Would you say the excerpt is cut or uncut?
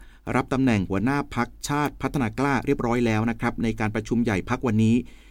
uncut